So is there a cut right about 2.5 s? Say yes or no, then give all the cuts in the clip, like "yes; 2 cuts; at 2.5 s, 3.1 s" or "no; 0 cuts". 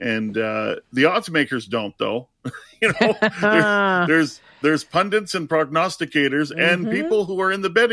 no; 0 cuts